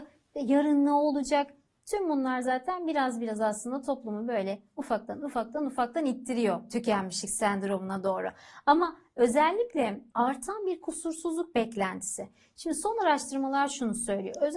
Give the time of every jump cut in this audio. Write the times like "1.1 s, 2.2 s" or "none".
none